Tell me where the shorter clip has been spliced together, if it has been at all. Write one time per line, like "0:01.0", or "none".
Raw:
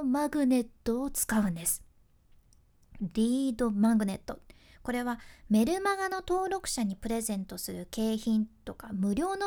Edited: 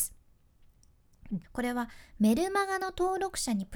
0:01.4